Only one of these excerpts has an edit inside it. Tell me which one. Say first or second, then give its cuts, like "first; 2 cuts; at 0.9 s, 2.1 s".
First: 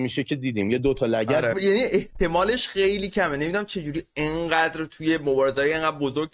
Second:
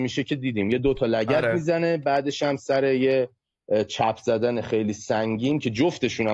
first; 1 cut; at 1.5 s